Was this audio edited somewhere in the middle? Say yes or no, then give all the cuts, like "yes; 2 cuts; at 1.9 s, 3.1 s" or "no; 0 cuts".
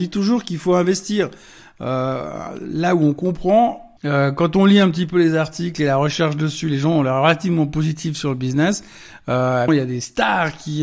yes; 2 cuts; at 4.0 s, 9.7 s